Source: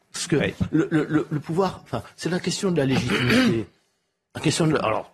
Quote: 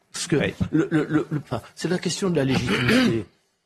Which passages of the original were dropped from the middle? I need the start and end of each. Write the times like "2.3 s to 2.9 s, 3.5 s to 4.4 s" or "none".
1.4 s to 1.8 s

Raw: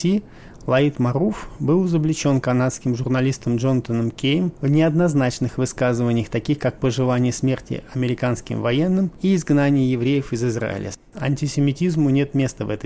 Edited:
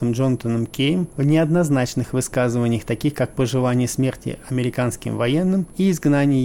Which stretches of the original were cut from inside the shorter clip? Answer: none

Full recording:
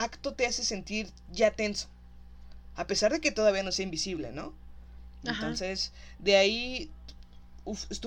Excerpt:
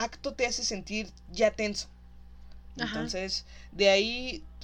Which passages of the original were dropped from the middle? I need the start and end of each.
2.7 s to 5.2 s

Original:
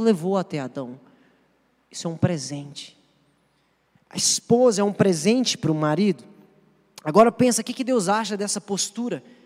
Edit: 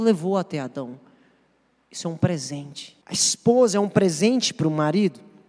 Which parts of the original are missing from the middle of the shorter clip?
3.0 s to 4.0 s

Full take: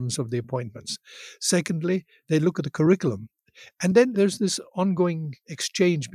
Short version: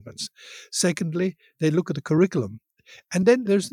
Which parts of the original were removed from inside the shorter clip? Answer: none

